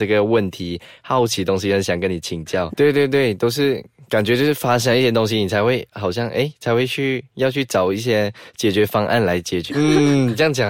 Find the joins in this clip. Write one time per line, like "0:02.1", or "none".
0:02.7
0:09.7